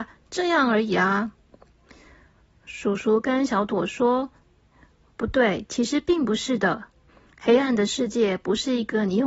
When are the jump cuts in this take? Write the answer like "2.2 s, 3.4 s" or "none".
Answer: none